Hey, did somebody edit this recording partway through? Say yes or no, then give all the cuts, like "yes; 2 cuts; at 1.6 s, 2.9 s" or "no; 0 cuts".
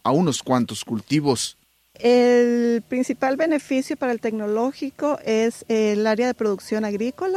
no; 0 cuts